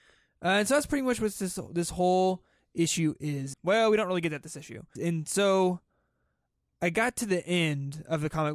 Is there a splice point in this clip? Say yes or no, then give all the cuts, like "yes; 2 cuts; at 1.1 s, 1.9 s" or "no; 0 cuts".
yes; 2 cuts; at 3.5 s, 5.0 s